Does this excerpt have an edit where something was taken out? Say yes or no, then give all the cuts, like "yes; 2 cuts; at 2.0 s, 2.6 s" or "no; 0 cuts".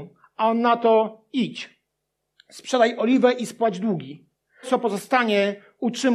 yes; 1 cut; at 4.6 s